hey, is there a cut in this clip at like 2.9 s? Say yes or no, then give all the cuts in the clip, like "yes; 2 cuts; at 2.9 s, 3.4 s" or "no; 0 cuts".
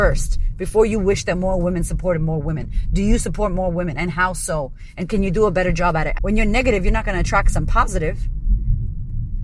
no; 1 cut; at 6.2 s